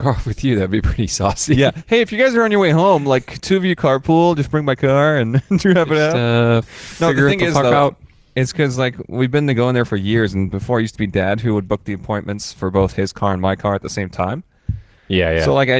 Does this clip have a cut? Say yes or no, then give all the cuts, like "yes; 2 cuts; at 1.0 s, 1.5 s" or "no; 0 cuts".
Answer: no; 0 cuts